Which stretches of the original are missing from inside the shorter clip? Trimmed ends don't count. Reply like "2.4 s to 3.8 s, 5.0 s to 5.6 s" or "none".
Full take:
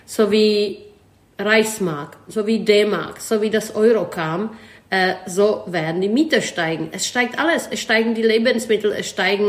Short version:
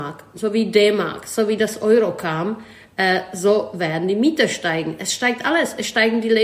none